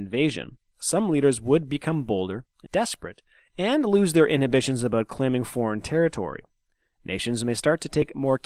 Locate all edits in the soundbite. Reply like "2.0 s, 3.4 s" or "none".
2.7 s